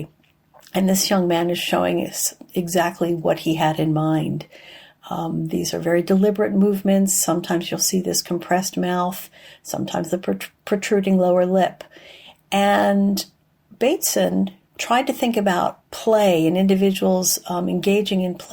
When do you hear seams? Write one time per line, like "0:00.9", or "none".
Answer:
0:14.7
0:15.9